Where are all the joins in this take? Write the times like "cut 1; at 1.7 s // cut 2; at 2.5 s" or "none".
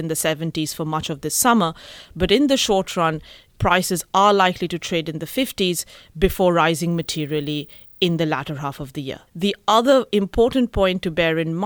cut 1; at 3.5 s // cut 2; at 9.3 s